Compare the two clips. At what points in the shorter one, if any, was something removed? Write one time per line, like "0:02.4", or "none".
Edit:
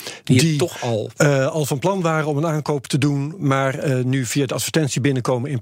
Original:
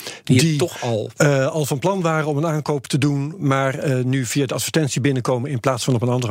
none